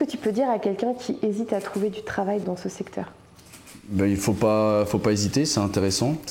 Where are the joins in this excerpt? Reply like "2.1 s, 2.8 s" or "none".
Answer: 2.4 s